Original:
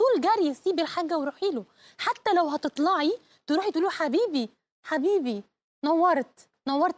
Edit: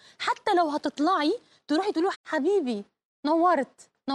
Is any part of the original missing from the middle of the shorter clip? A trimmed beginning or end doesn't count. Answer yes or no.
yes